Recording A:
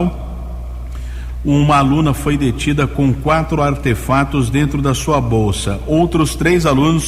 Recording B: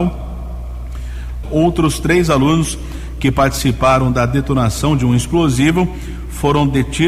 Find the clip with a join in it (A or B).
B